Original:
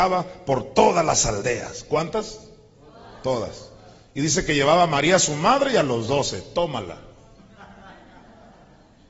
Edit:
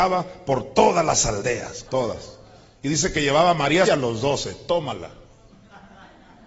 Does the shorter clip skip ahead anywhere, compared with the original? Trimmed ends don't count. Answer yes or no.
yes